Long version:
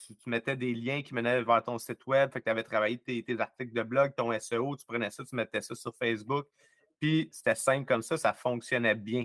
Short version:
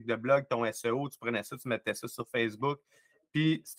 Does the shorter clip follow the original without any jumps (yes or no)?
yes